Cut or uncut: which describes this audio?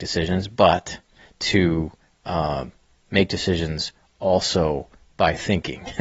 uncut